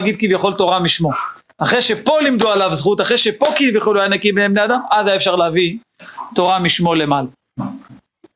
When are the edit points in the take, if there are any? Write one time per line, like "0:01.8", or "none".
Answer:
none